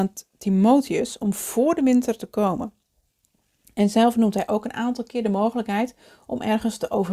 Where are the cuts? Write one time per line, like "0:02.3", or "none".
none